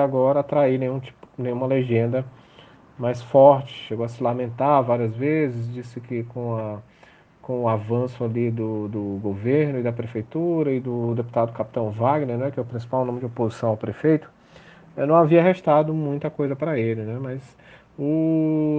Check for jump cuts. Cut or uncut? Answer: uncut